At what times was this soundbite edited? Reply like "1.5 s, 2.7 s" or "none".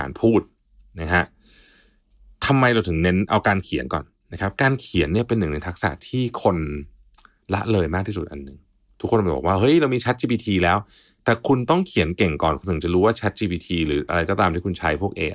none